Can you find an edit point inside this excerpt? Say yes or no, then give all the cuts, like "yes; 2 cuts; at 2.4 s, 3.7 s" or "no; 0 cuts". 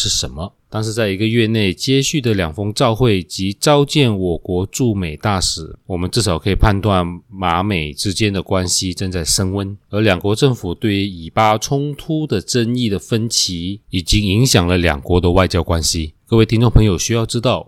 no; 0 cuts